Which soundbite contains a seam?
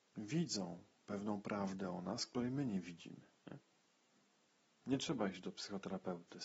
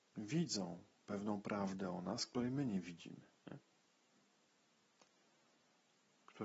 first; 1 cut; at 4.8 s

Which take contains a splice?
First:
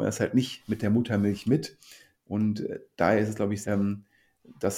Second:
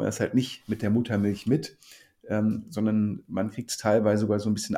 first; 2 cuts; at 2.1 s, 3.6 s

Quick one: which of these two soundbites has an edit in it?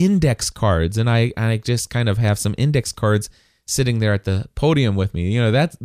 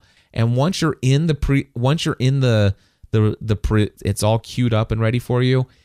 second; 1 cut; at 4.0 s

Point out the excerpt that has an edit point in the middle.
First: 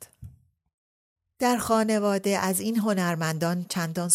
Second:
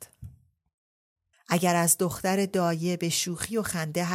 second; 1 cut; at 1.3 s

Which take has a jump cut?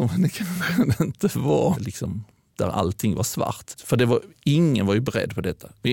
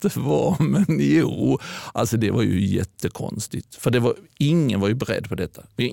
first; 2 cuts; at 1.8 s, 3.7 s

